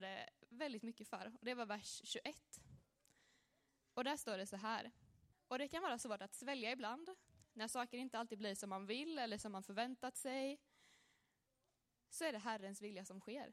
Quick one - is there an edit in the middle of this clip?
yes; 1 cut; at 5.3 s

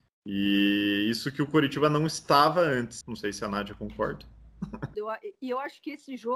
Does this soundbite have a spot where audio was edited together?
yes; 2 cuts; at 3.0 s, 4.9 s

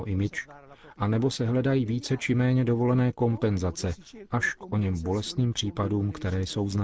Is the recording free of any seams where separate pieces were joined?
yes; 0 cuts

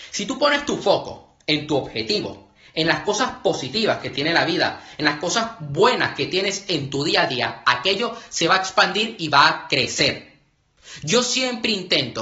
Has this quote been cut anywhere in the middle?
no; 0 cuts

